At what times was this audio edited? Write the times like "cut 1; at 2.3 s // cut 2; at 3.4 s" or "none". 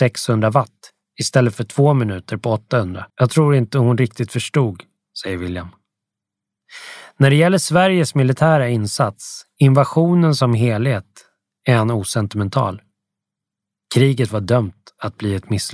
cut 1; at 3.1 s